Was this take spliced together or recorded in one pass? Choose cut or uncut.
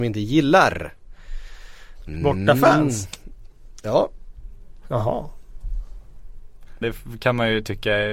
cut